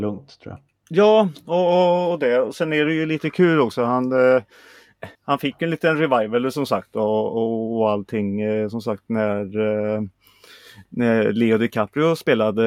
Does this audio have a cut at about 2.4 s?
no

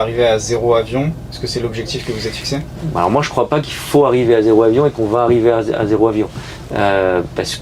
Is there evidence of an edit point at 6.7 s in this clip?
no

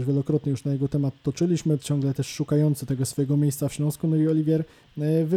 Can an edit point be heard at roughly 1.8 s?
yes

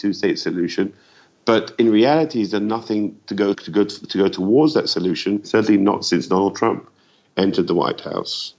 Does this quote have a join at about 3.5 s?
yes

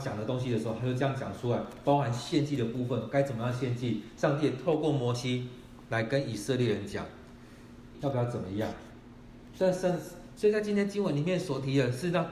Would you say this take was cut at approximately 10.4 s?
yes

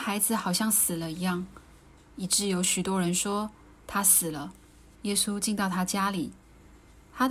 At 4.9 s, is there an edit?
yes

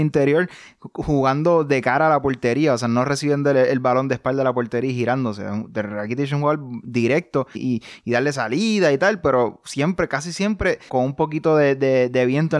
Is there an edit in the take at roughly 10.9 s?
yes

